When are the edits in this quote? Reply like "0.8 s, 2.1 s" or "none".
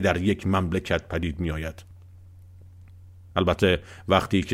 3.3 s